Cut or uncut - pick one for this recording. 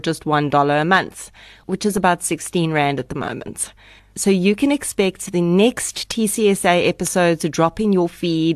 cut